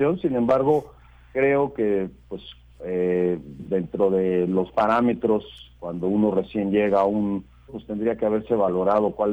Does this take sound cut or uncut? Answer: cut